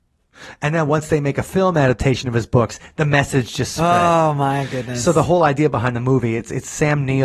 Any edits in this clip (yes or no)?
no